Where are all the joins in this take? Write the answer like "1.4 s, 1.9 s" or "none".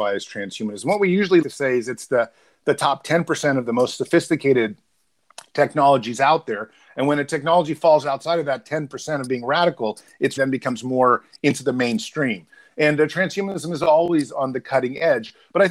1.4 s, 10.4 s

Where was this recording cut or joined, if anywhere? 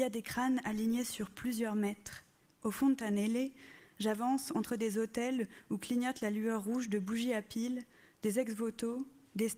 2.5 s

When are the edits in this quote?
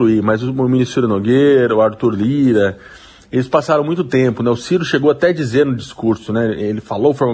none

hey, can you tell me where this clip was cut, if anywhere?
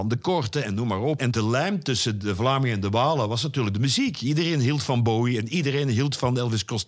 1.2 s

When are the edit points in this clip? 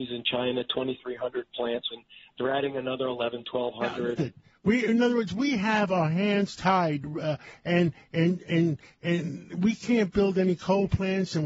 1.9 s, 4.2 s

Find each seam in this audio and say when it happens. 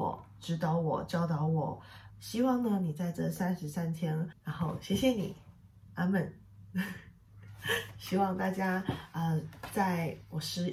2.1 s, 4.3 s

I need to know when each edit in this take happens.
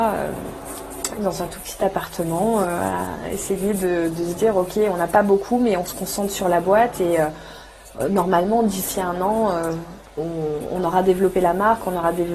none

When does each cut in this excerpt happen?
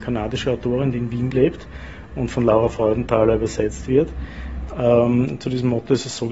4.7 s

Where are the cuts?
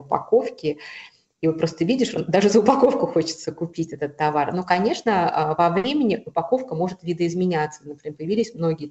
none

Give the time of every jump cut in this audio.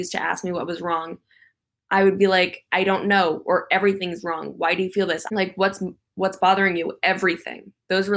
5.3 s

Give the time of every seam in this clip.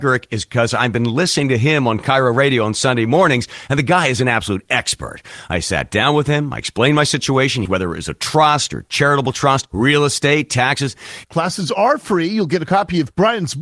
7.7 s, 11.2 s

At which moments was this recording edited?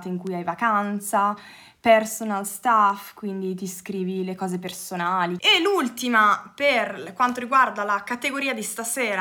5.4 s

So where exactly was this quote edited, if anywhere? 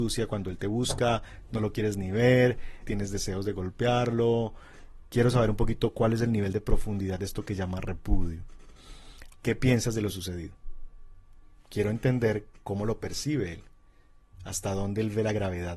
2.8 s, 9.3 s

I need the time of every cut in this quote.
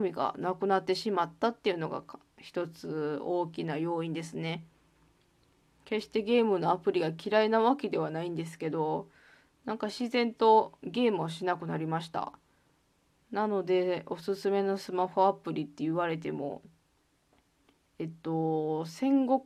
none

